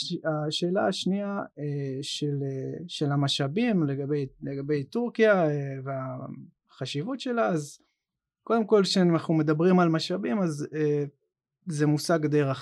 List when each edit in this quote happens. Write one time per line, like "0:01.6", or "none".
none

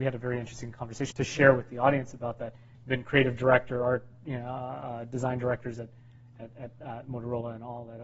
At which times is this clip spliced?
0:01.1
0:02.7

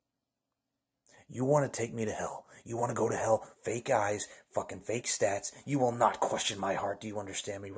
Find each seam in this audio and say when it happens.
0:03.5
0:05.6

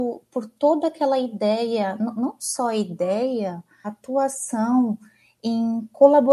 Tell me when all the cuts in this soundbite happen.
0:03.8

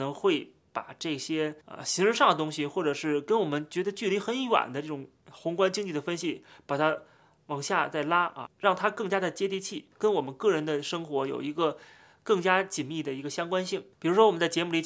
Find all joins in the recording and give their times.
0:01.6

